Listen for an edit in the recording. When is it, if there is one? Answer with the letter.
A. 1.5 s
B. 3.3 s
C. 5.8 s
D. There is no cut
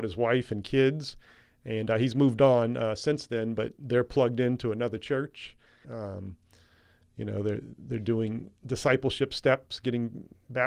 C